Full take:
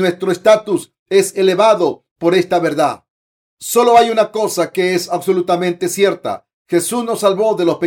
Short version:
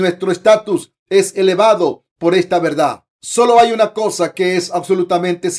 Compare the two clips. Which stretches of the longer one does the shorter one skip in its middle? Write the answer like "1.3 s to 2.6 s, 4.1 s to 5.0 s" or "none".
3.1 s to 3.5 s